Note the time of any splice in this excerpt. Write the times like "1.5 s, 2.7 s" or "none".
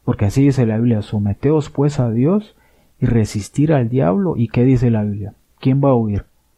none